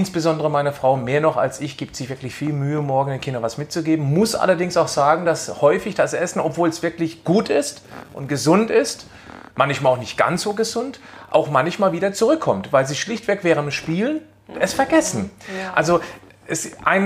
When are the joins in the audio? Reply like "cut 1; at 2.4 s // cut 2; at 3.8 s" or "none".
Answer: none